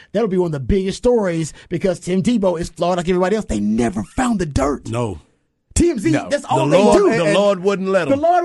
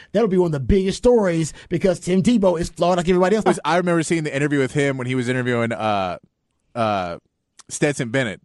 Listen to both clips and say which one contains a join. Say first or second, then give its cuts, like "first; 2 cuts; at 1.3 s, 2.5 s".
second; 1 cut; at 3.5 s